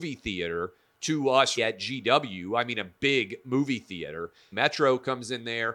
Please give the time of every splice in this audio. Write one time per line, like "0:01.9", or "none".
0:01.6
0:04.5